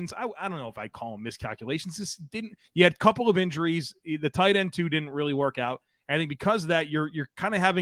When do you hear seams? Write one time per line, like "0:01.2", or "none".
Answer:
none